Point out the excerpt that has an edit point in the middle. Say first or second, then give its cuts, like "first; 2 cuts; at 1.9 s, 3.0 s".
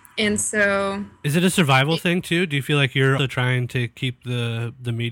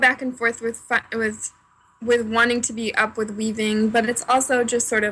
first; 1 cut; at 3.2 s